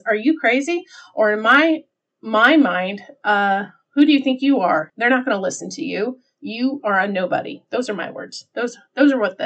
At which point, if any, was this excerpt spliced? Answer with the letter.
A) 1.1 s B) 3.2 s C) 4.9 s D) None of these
C